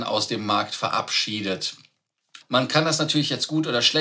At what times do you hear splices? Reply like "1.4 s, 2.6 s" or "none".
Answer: 2.4 s